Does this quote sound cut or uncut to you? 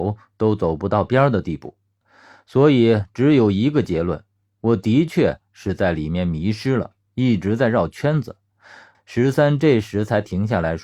cut